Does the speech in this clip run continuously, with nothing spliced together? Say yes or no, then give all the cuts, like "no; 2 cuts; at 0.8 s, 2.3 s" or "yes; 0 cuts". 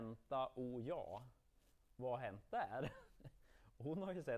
yes; 0 cuts